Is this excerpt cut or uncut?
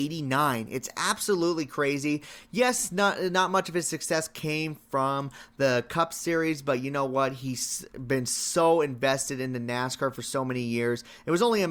uncut